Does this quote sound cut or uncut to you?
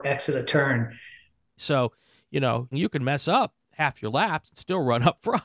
cut